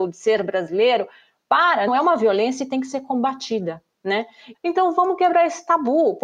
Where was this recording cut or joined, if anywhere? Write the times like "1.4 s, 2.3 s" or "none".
1.9 s, 4.5 s